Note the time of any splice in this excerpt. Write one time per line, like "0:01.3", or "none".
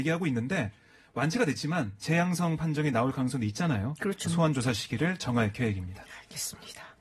0:04.2